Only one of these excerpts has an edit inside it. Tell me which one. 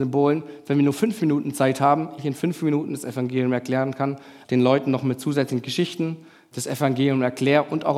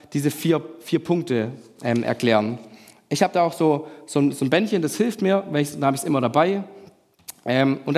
first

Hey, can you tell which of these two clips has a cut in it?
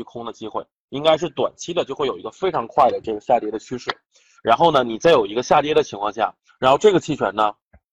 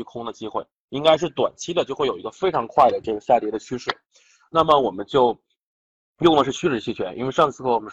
first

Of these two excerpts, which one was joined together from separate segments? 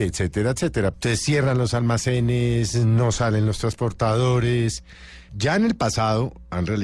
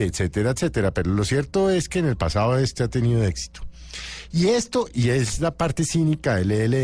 first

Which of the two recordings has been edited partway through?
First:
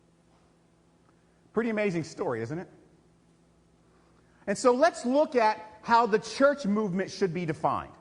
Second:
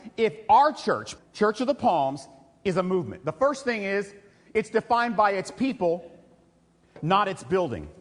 second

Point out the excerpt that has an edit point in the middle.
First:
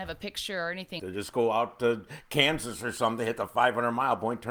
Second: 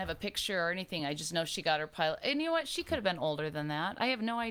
first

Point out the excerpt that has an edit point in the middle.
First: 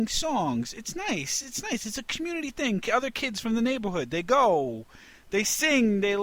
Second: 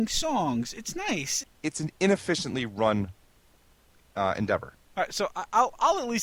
second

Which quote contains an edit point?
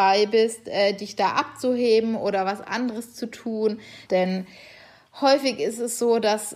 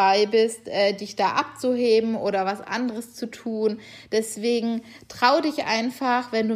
first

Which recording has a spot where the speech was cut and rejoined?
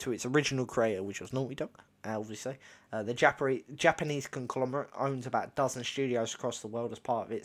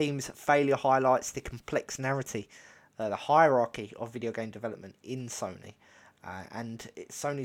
first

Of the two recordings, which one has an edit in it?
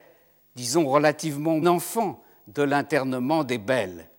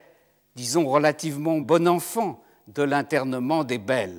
first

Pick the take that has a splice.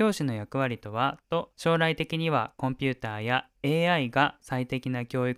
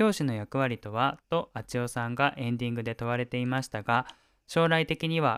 first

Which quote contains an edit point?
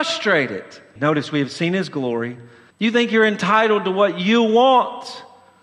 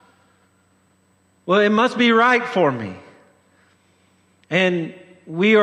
first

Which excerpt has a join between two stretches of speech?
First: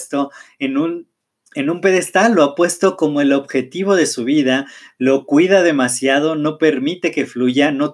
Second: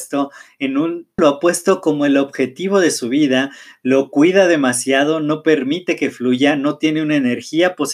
second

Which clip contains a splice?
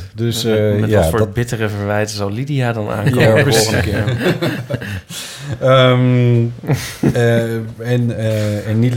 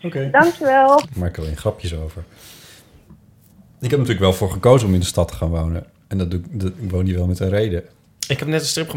second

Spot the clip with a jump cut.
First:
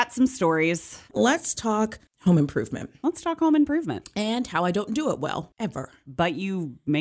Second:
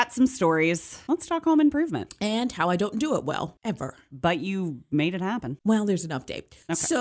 second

